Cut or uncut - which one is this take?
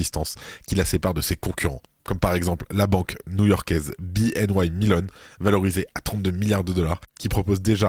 uncut